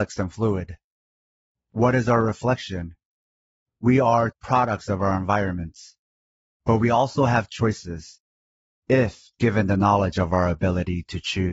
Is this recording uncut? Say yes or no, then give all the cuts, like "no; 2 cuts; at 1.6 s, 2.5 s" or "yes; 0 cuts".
no; 1 cut; at 4.3 s